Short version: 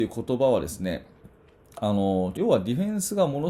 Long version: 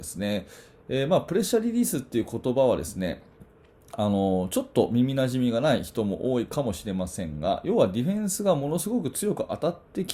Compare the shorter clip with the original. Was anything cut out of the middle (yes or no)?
yes